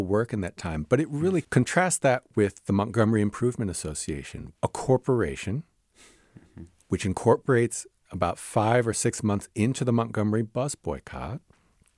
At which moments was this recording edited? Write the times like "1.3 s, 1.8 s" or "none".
1.4 s, 4.6 s